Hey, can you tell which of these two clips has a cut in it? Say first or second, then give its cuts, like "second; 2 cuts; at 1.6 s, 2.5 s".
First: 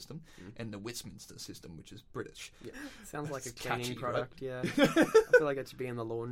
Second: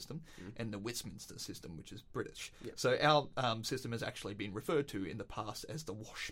first; 1 cut; at 2.7 s